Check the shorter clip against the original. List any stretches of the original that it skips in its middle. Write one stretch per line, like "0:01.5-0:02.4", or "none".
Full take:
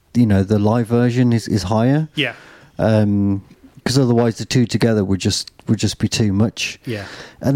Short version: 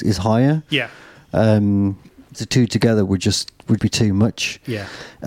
0:03.8-0:04.3
0:05.8-0:06.0